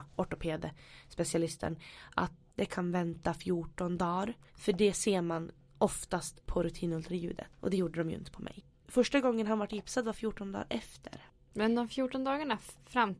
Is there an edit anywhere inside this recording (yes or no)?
yes